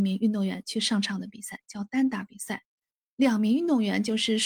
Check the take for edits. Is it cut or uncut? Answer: uncut